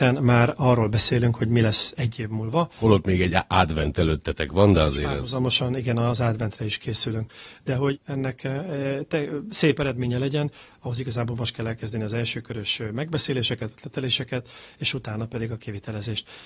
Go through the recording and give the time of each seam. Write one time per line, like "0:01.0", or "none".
0:08.0